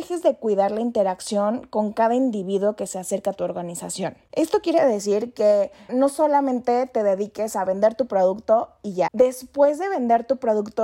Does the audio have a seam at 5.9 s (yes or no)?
yes